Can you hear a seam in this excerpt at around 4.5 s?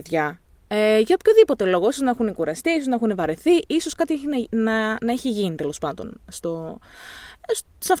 no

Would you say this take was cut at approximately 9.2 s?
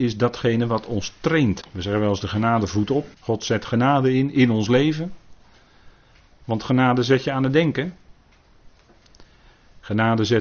no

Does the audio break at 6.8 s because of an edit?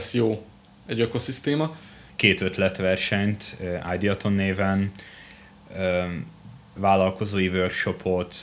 yes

